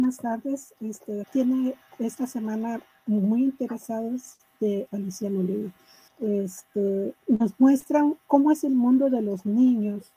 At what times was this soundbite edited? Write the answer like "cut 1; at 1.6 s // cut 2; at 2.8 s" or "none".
cut 1; at 1.2 s // cut 2; at 6.1 s // cut 3; at 7.2 s